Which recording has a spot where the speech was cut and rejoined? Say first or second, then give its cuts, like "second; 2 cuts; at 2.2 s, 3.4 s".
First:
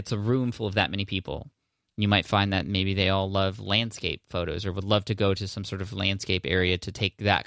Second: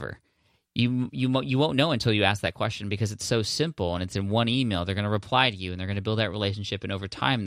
first; 1 cut; at 1.9 s